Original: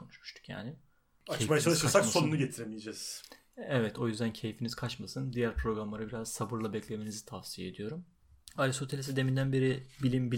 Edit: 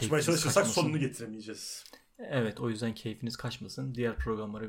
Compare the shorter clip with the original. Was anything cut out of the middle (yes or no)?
no